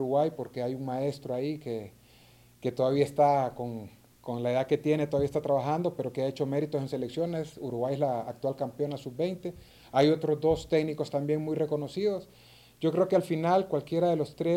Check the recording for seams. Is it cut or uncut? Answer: uncut